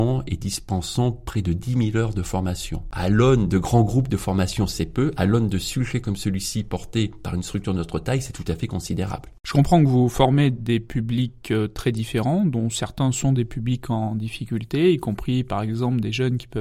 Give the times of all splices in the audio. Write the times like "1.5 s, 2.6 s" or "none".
none

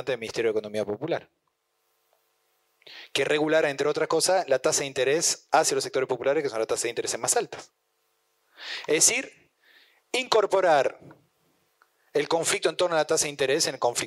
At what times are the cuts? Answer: none

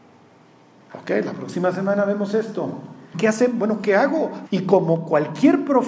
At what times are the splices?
3.1 s, 4.5 s

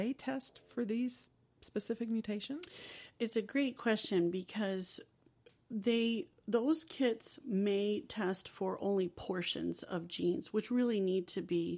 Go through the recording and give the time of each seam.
none

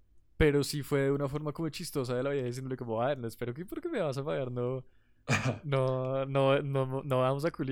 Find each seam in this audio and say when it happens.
none

